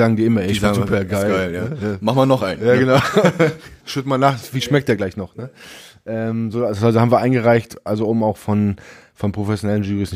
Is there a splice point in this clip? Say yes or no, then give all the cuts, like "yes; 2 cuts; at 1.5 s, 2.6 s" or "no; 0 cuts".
yes; 1 cut; at 3.8 s